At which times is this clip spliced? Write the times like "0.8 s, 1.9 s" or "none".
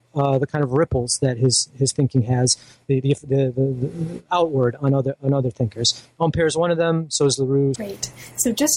7.7 s